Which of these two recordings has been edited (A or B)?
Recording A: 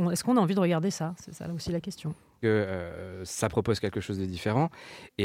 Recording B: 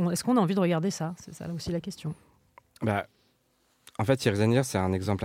A